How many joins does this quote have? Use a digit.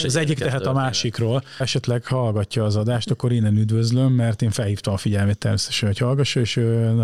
1